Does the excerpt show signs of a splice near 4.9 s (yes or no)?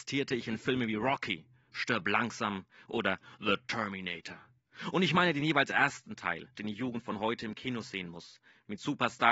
no